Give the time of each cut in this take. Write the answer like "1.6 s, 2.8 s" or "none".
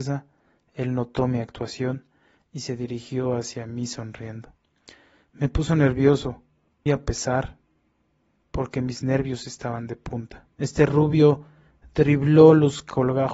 6.9 s, 10.5 s